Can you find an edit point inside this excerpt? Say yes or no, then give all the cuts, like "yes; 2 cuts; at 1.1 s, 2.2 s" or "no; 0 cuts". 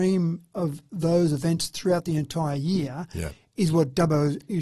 no; 0 cuts